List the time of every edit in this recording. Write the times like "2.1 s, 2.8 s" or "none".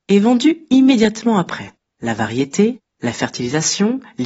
1.9 s